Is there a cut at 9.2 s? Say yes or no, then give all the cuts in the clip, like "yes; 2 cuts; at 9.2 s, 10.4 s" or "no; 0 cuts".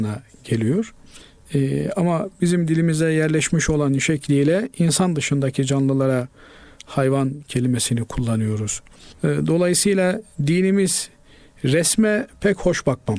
no; 0 cuts